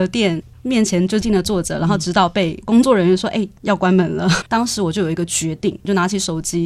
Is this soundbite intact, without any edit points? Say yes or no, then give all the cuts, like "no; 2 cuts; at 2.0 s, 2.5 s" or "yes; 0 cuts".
no; 2 cuts; at 1.2 s, 4.4 s